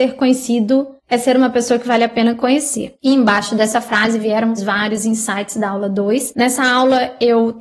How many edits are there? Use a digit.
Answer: 1